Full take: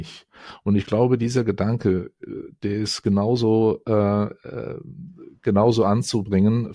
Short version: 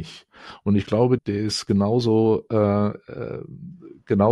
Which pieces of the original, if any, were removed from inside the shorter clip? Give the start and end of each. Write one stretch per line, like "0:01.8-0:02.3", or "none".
0:01.2-0:02.5